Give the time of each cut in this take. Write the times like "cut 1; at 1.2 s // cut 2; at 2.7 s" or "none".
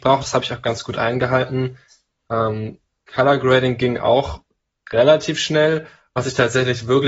none